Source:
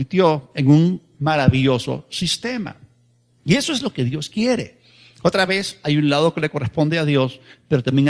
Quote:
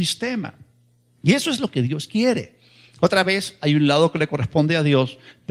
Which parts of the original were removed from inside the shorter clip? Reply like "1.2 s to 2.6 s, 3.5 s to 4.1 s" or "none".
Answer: none